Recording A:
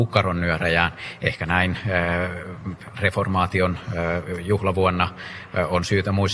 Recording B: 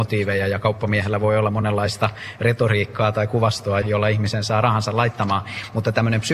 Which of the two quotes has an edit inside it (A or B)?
B